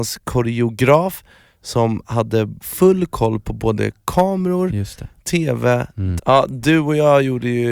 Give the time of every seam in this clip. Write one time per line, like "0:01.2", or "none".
0:06.2